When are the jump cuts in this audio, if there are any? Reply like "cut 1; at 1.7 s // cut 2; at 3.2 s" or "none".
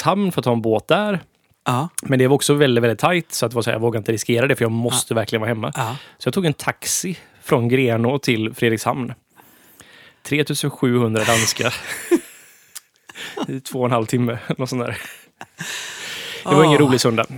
none